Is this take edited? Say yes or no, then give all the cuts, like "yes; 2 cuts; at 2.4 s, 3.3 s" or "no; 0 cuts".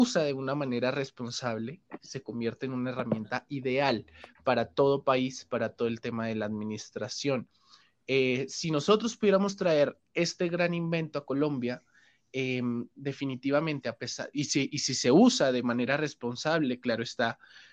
no; 0 cuts